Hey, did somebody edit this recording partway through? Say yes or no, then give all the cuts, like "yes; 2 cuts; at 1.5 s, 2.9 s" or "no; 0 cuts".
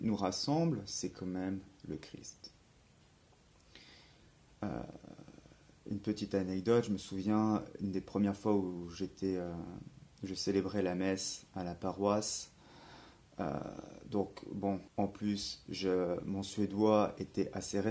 yes; 2 cuts; at 4.5 s, 14.9 s